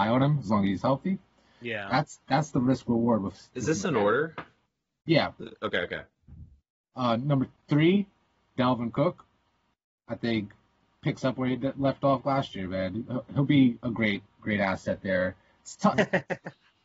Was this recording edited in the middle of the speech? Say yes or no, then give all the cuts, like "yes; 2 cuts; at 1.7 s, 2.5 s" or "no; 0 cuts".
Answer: yes; 1 cut; at 15.9 s